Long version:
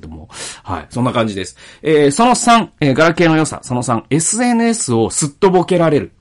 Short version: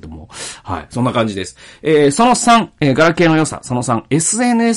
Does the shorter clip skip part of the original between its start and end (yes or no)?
no